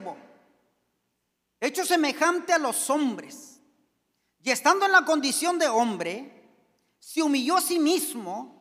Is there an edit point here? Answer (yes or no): no